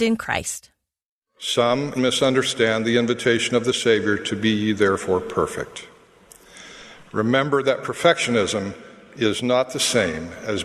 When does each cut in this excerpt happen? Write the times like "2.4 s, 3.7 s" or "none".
2.0 s